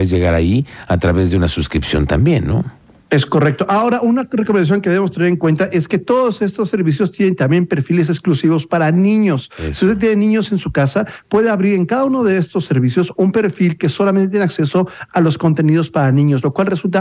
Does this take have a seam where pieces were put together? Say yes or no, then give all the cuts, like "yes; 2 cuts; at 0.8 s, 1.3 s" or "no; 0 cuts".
no; 0 cuts